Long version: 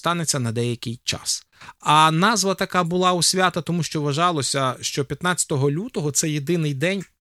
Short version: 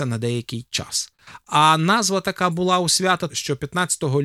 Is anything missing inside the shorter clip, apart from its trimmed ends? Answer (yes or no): yes